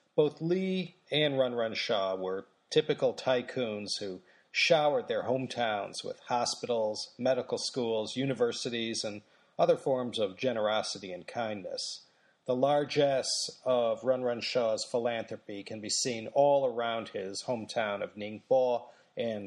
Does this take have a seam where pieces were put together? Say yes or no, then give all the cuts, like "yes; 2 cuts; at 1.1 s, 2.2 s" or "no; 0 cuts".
no; 0 cuts